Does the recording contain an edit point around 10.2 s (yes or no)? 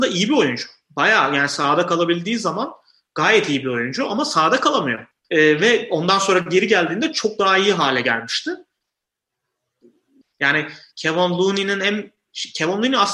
yes